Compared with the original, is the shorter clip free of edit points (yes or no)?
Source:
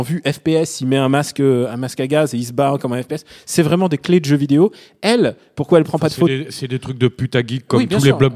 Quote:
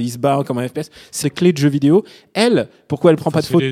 no